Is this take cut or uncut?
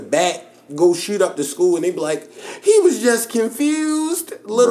uncut